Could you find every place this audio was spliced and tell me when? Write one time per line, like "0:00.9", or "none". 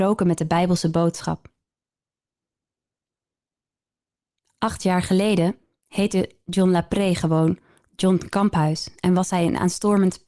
none